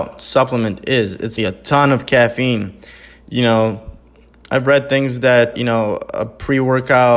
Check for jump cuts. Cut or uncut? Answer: cut